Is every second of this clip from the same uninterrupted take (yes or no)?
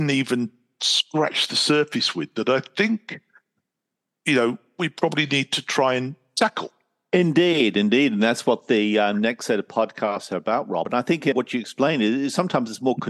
yes